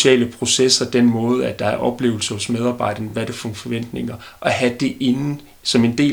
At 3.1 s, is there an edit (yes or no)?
no